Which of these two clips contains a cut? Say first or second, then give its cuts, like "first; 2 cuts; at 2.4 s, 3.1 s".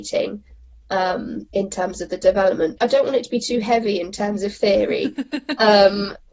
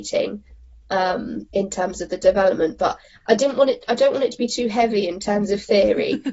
first; 1 cut; at 2.8 s